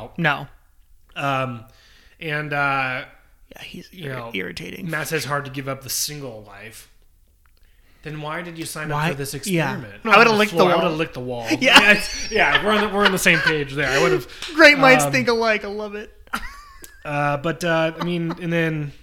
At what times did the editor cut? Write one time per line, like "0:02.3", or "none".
0:10.0

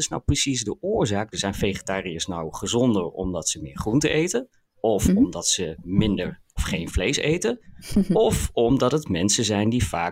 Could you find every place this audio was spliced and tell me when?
0:01.3

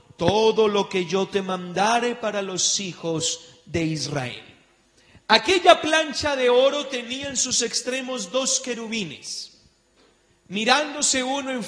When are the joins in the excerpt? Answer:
none

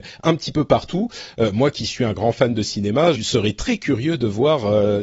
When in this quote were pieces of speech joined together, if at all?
0:03.1

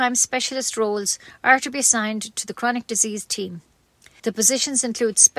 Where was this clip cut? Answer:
0:04.2

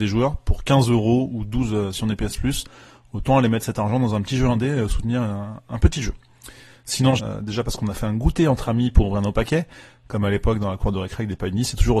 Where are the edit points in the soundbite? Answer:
0:07.2

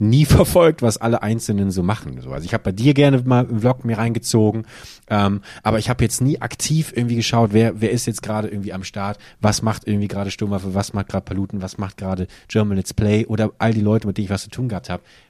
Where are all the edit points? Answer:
none

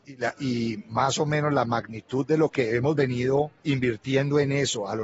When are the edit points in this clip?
0:03.6

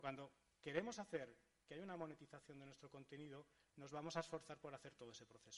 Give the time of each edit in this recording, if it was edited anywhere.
none

